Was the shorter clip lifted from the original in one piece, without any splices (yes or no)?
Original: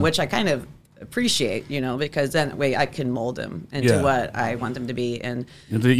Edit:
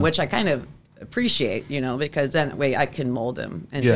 yes